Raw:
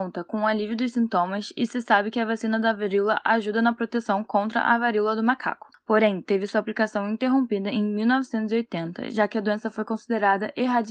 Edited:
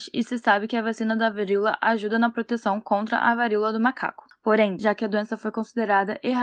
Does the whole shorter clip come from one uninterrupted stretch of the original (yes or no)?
no